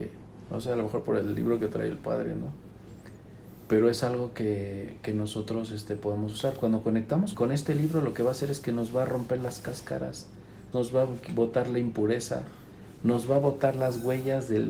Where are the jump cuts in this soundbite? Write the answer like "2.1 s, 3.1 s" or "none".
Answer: 7.3 s, 10.7 s